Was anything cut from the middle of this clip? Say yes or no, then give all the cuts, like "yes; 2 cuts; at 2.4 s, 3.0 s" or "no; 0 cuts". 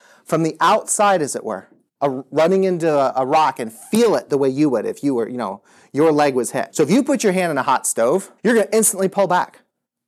yes; 3 cuts; at 1.9 s, 6.7 s, 8.4 s